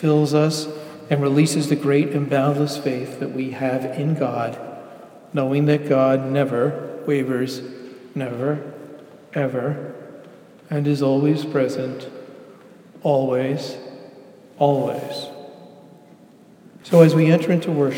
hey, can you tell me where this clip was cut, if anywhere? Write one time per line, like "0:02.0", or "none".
0:16.8